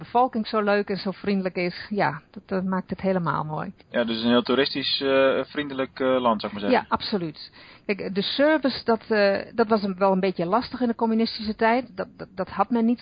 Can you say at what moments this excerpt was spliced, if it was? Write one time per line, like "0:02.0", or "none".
0:03.8